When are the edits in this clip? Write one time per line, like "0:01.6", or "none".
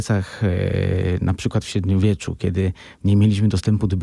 none